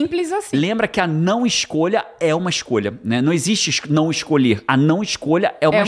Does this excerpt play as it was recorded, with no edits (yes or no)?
yes